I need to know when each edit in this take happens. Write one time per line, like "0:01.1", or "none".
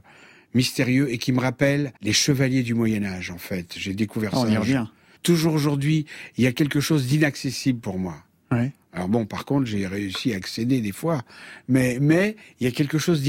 0:02.0
0:05.2

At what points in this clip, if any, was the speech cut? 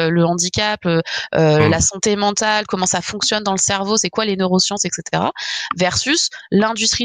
none

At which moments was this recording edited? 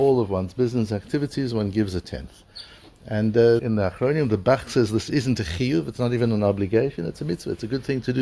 0:03.6

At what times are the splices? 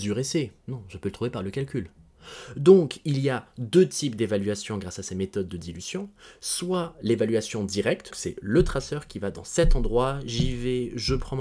0:08.1

